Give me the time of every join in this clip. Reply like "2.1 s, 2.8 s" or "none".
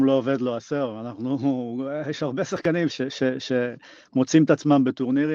2.9 s